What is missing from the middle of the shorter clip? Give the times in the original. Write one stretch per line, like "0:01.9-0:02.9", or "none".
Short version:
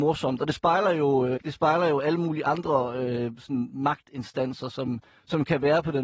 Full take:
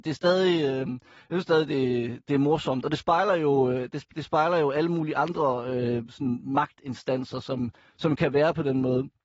0:03.8-0:04.1